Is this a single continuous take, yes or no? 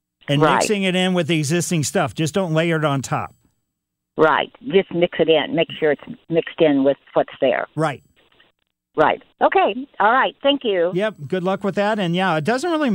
yes